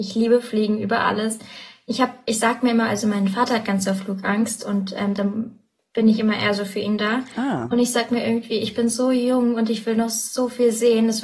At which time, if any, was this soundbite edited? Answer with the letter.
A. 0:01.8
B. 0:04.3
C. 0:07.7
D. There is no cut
D